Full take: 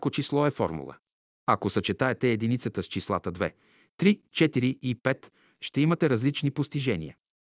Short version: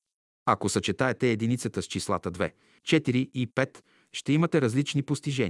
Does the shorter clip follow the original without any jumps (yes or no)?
no